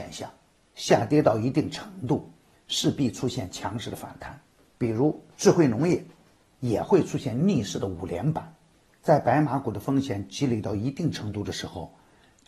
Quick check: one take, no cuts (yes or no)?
no